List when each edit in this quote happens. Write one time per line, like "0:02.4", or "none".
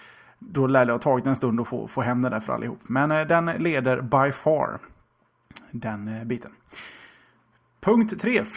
none